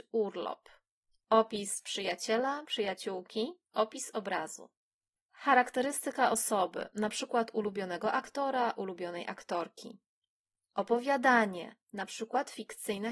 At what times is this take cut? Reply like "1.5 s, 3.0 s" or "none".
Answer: none